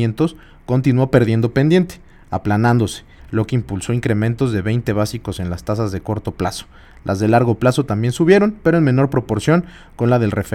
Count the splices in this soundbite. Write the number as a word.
one